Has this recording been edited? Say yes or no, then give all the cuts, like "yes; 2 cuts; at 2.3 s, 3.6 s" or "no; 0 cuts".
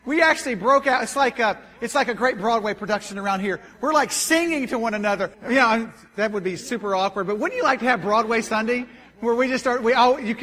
yes; 1 cut; at 5.3 s